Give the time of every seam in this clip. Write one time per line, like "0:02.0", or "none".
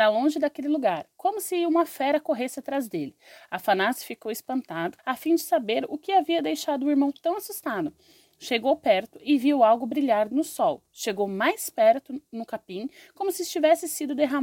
0:05.0